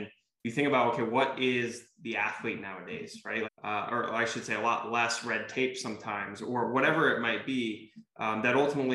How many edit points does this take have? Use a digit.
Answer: 1